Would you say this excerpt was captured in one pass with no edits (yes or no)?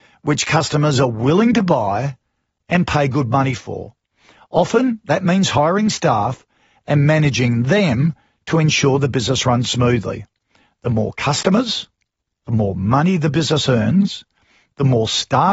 yes